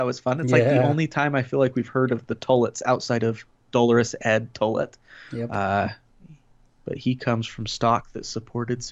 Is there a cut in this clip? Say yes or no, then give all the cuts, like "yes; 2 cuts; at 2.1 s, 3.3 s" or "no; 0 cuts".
no; 0 cuts